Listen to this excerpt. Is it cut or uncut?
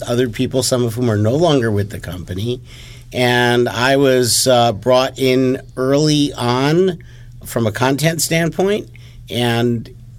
uncut